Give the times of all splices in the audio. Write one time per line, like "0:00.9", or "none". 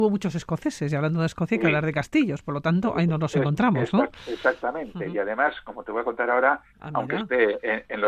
0:06.7